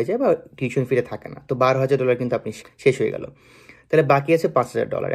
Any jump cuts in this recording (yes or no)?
yes